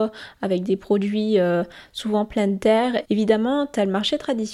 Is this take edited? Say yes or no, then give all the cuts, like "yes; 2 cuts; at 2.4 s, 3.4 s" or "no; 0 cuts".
yes; 1 cut; at 3.0 s